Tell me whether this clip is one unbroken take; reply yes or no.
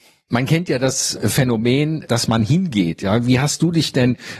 no